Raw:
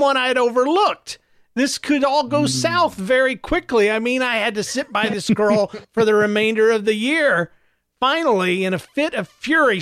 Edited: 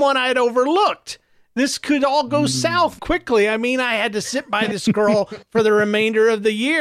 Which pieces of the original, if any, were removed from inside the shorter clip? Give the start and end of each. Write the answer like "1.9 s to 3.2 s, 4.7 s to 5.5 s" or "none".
3.0 s to 3.4 s